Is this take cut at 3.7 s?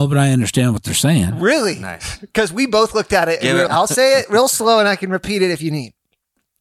yes; 1 cut; at 3.7 s

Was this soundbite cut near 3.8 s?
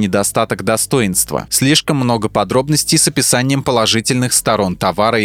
no; 1 cut; at 1.5 s

